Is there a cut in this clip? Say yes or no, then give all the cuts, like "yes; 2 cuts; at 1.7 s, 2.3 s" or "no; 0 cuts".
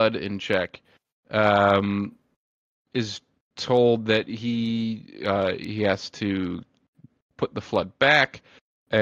no; 0 cuts